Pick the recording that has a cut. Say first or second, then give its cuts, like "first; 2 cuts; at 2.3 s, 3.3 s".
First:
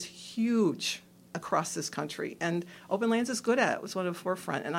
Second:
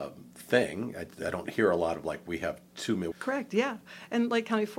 second; 1 cut; at 3.1 s